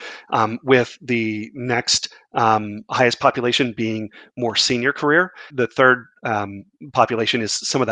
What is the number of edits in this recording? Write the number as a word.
one